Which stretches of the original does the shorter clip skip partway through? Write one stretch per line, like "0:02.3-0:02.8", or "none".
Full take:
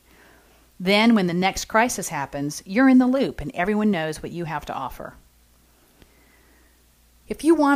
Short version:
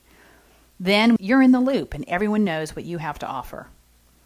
0:01.2-0:02.6